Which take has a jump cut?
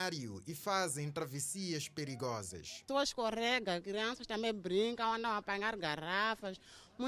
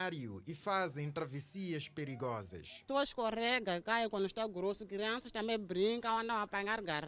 first; 1 cut; at 3.8 s

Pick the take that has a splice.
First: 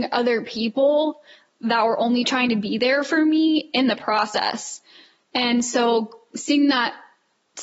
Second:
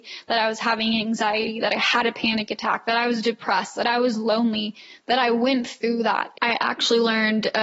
second; 1 cut; at 6.3 s

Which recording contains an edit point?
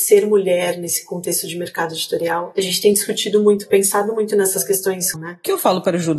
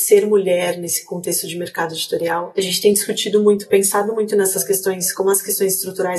first; 1 cut; at 5.1 s

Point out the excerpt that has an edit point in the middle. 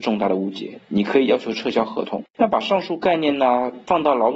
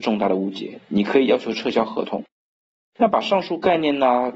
first; 1 cut; at 2.3 s

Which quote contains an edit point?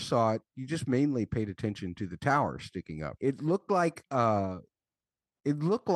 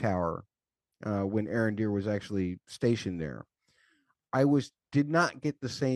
first; 1 cut; at 3.2 s

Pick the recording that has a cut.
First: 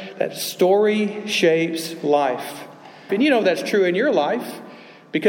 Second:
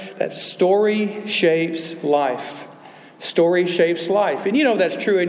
first; 1 cut; at 3.1 s

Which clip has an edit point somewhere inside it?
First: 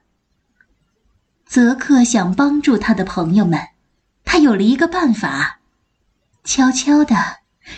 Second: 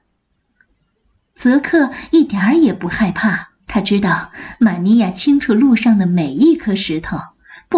second; 2 cuts; at 1.3 s, 3.6 s

